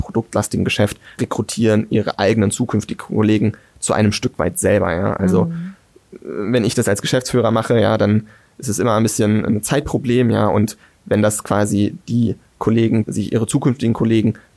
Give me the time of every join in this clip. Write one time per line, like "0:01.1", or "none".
0:01.2
0:13.0